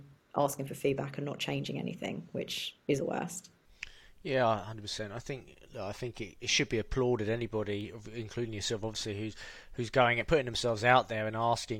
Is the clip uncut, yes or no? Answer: no